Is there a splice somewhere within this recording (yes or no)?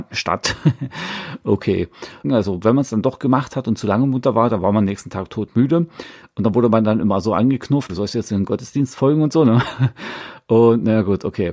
yes